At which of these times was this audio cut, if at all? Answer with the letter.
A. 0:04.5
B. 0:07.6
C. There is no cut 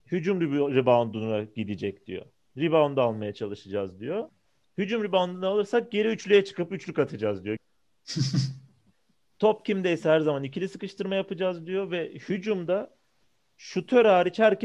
B